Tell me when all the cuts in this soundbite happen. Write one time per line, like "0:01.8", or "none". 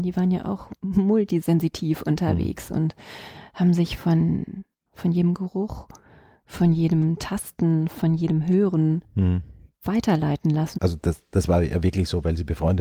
0:04.9
0:10.7